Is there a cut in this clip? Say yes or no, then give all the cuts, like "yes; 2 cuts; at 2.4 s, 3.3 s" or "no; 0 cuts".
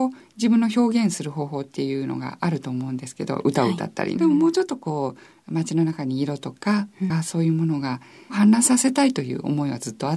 yes; 2 cuts; at 4.2 s, 7.1 s